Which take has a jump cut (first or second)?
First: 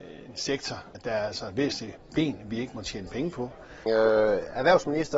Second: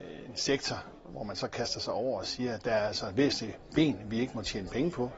first